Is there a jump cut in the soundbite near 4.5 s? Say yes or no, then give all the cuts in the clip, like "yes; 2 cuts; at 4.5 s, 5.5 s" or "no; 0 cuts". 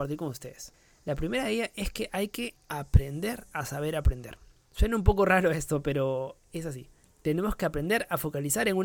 no; 0 cuts